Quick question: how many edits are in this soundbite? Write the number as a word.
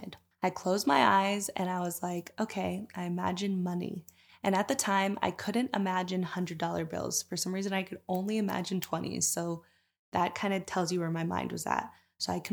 zero